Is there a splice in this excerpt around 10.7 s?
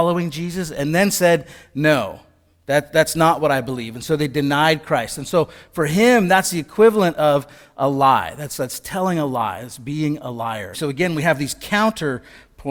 yes; 1 cut; at 10.7 s

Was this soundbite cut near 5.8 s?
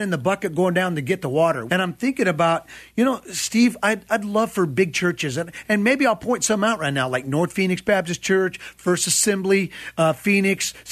no; 1 cut; at 1.7 s

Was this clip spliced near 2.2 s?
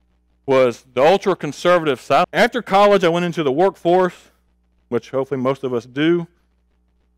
yes; 1 cut; at 2.2 s

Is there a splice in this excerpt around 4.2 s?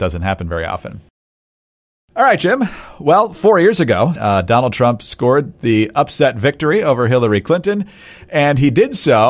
yes; 1 cut; at 4.2 s

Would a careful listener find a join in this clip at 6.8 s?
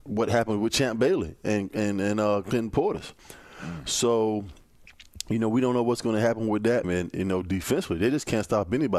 yes; 1 cut; at 6.8 s

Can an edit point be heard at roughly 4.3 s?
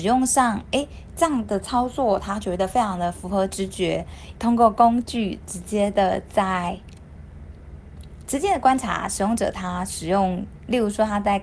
yes; 1 cut; at 4.3 s

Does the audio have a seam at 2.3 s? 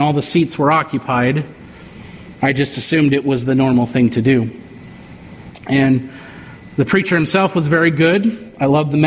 yes; 1 cut; at 2.3 s

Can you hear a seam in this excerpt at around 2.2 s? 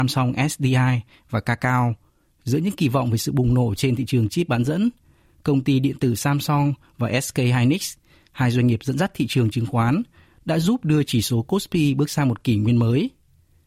yes; 1 cut; at 2.2 s

